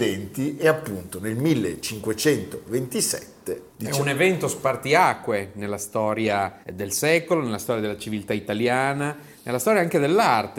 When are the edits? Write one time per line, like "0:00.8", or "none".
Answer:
0:06.6